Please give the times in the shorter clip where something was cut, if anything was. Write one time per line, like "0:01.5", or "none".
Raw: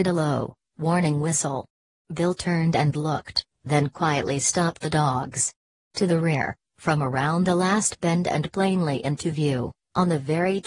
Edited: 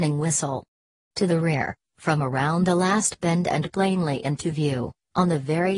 0:00.9